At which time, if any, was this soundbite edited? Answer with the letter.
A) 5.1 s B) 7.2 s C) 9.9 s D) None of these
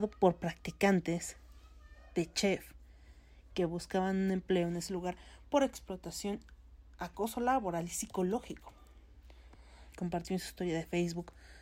C